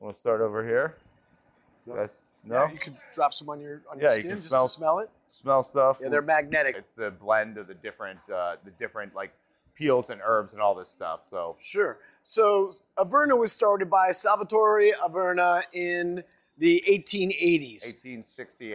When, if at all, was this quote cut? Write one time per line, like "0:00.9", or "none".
0:06.7